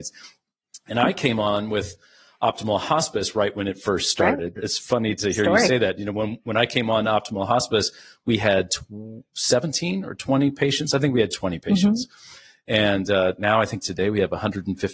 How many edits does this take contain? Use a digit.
1